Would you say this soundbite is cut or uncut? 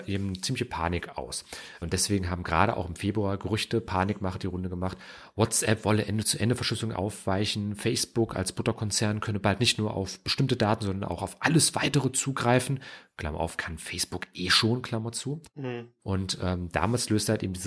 cut